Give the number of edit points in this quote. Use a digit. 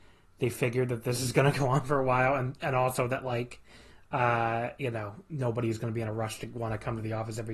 0